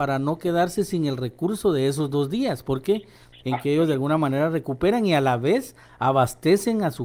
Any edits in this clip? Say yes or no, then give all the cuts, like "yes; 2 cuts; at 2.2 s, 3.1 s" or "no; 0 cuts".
yes; 1 cut; at 3.4 s